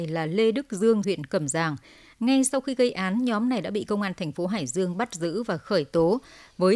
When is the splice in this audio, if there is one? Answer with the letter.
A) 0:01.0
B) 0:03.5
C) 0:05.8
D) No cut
A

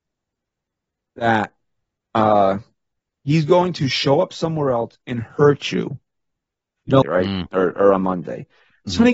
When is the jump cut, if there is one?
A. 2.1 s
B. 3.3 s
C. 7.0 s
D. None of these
C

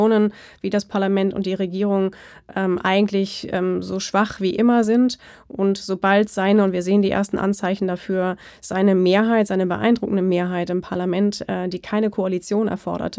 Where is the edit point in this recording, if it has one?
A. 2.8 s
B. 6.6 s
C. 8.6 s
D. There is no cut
D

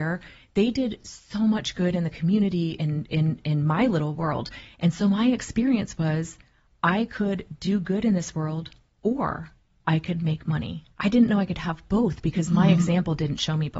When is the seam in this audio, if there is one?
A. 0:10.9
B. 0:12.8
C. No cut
A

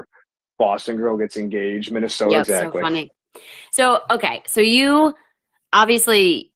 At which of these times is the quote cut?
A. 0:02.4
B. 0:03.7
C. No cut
A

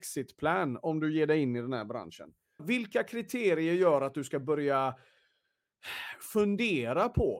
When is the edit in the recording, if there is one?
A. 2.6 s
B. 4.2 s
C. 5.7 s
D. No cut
A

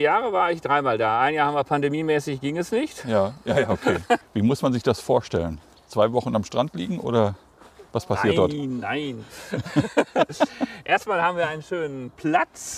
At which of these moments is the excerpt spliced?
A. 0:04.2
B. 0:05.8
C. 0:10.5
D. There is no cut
A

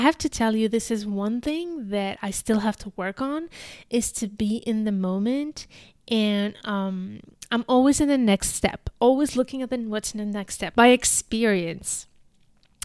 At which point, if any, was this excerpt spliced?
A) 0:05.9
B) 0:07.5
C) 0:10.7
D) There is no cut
C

